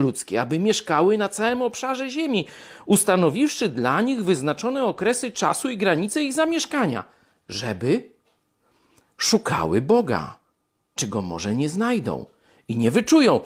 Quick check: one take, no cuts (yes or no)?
yes